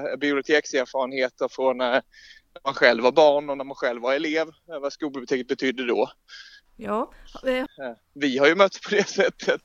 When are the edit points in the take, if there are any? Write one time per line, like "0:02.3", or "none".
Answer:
0:06.7
0:07.7